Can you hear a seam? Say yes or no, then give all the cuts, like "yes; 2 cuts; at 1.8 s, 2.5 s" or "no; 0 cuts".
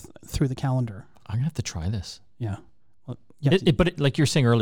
no; 0 cuts